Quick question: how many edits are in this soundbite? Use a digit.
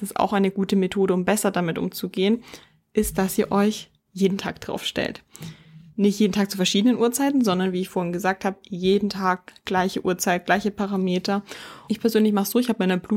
1